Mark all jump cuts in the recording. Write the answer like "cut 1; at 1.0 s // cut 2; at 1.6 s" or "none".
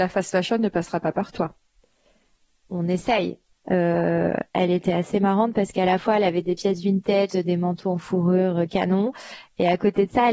cut 1; at 3.5 s // cut 2; at 7.3 s